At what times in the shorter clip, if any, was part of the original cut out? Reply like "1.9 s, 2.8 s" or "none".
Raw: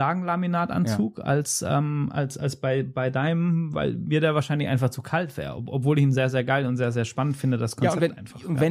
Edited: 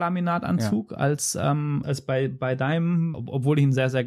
1.8 s, 3.1 s